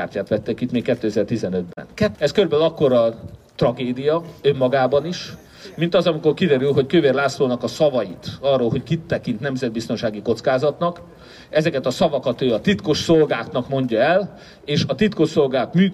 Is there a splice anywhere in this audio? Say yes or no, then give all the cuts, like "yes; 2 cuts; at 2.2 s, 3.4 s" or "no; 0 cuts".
yes; 1 cut; at 2.1 s